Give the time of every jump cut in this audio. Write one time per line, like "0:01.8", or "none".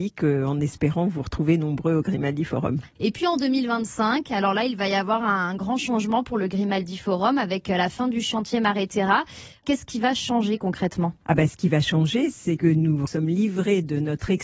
0:12.6